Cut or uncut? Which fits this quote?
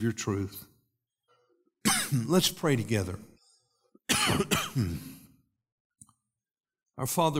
cut